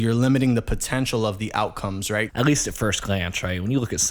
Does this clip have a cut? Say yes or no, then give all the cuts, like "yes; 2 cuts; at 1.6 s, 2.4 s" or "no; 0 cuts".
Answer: yes; 1 cut; at 2.3 s